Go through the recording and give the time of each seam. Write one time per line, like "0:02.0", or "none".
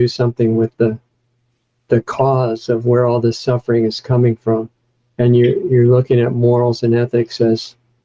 none